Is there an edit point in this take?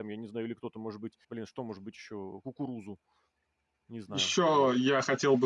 yes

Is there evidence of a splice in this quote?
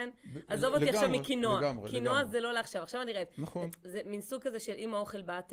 no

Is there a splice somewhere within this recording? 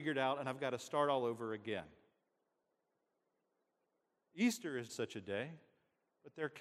yes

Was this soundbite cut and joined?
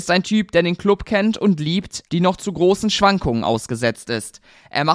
yes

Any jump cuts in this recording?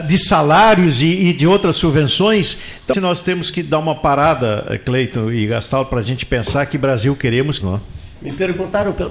yes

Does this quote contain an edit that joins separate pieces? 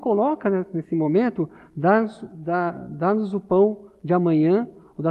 no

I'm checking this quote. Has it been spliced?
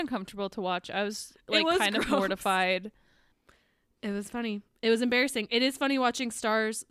no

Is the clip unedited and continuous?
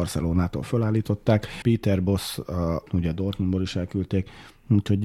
no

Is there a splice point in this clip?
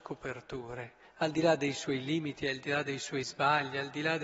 no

